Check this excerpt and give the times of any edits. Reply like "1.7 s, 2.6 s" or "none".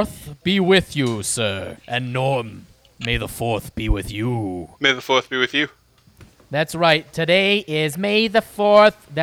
1.8 s, 4.7 s